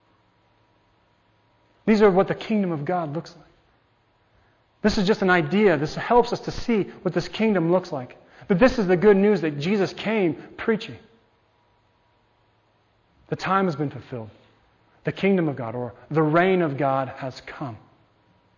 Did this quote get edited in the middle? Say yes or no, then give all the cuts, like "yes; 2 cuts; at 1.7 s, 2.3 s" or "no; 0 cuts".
no; 0 cuts